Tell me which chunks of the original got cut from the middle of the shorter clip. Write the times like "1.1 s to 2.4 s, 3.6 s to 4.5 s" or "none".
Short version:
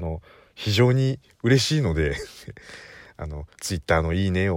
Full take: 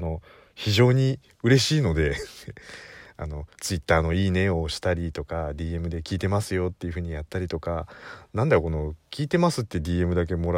none